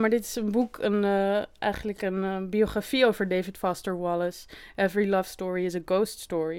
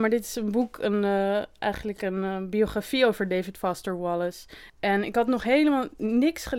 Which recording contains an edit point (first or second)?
second